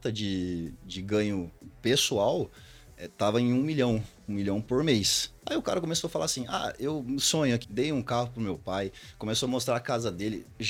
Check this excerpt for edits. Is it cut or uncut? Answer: cut